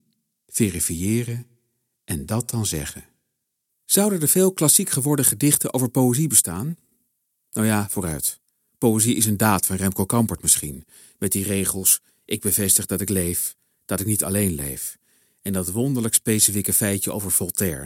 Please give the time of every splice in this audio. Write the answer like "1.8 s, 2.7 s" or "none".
3.7 s